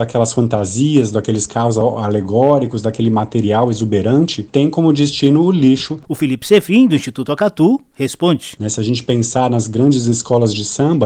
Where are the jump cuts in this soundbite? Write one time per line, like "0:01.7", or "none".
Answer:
0:06.0
0:08.6